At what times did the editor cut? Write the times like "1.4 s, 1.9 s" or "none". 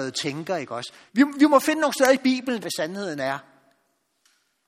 1.1 s, 2.6 s